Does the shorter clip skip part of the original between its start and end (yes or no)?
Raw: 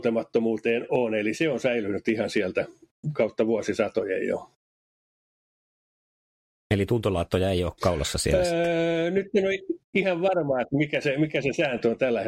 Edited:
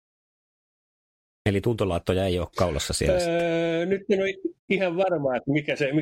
no